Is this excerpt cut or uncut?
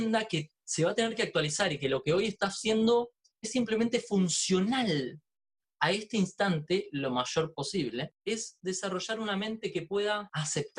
uncut